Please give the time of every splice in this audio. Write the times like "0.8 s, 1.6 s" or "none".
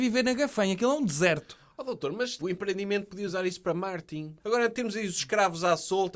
2.4 s, 4.4 s